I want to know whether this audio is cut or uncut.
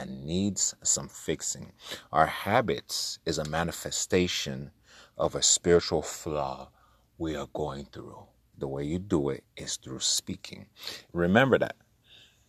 cut